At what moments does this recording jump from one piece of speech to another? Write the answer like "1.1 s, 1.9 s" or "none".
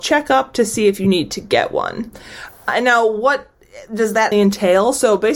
4.3 s